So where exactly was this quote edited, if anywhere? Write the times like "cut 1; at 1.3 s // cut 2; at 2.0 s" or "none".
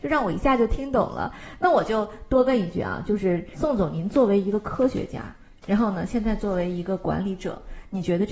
none